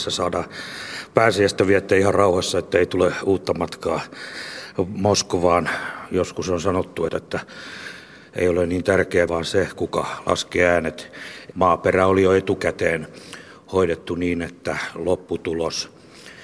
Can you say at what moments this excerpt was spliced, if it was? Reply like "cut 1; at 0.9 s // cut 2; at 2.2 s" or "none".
cut 1; at 7.1 s // cut 2; at 9.3 s // cut 3; at 11.5 s